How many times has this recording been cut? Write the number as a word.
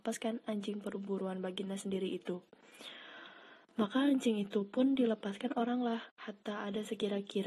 one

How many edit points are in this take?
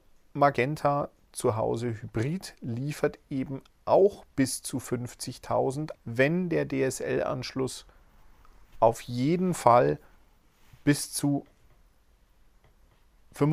one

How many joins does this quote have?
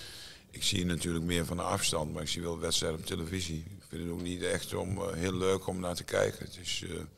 zero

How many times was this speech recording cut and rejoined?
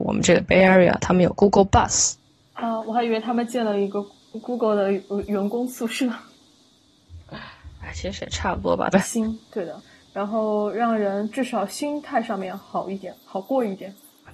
one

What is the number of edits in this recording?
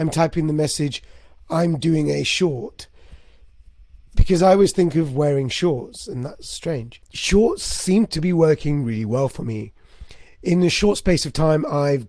zero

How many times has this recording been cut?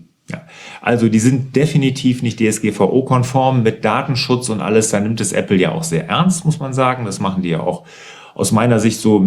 zero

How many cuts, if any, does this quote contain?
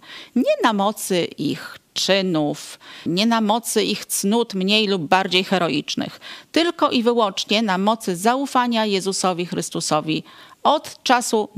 one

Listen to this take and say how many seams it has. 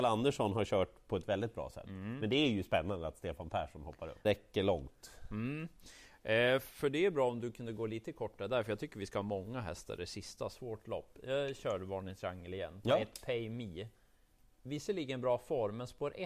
one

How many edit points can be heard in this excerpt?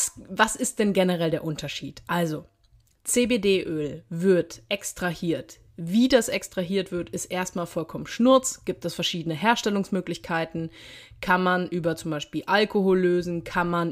zero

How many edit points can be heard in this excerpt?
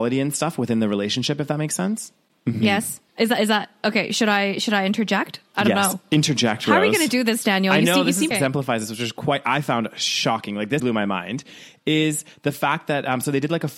three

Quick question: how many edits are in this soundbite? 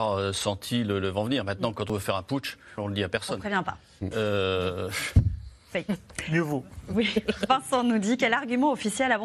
one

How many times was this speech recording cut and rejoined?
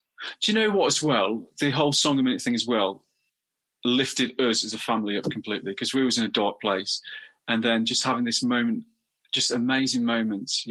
zero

